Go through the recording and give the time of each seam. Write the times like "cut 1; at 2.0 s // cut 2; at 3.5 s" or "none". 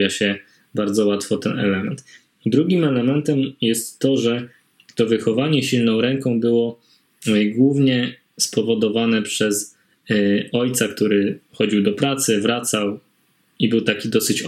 none